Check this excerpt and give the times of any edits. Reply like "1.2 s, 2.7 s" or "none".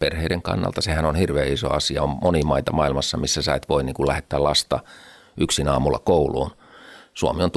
none

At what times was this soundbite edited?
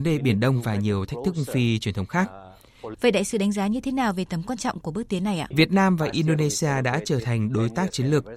2.9 s, 5.5 s

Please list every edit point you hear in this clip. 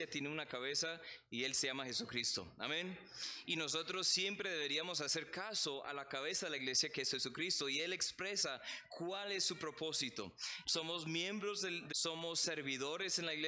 10.6 s, 11.9 s

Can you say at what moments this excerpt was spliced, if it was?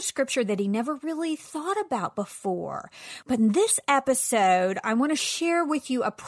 3.2 s

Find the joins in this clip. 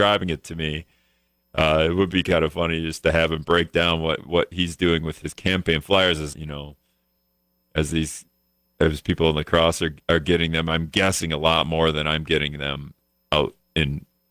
6.3 s

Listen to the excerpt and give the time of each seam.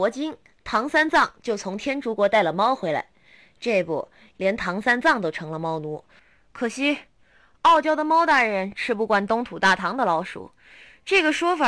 4.3 s

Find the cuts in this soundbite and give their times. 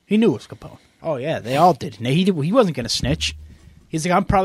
1.0 s

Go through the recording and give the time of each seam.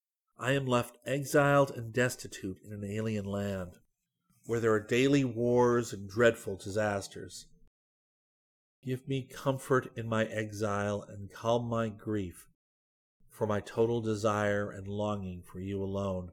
none

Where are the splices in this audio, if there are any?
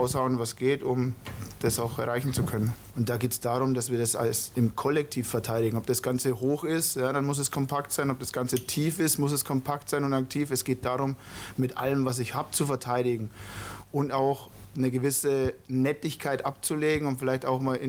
2.9 s

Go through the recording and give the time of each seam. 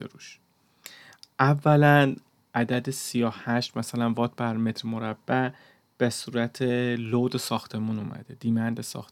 2.4 s

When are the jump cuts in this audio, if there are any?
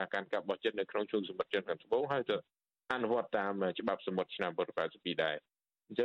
none

